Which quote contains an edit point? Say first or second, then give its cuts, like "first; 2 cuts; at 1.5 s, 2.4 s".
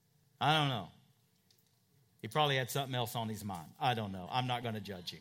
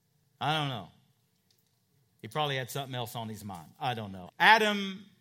second; 1 cut; at 4.3 s